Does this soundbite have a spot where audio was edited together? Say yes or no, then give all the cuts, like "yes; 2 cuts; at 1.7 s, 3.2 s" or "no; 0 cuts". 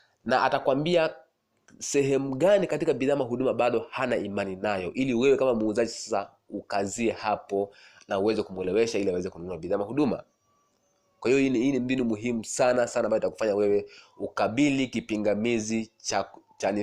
yes; 1 cut; at 12.9 s